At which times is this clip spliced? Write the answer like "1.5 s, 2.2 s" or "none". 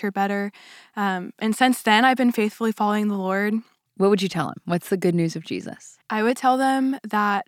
3.9 s, 6.0 s